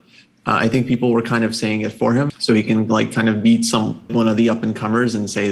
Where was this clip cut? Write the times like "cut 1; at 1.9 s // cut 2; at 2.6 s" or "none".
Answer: cut 1; at 2.3 s // cut 2; at 4.1 s